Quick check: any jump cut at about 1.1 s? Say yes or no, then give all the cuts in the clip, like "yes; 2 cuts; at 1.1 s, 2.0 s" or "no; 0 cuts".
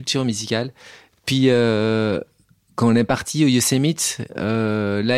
no; 0 cuts